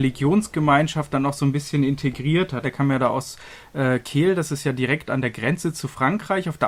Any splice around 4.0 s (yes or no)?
no